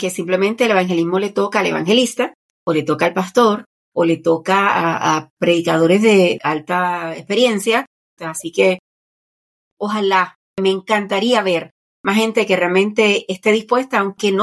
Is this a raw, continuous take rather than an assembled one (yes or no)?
no